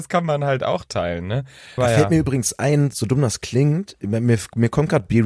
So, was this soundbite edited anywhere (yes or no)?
yes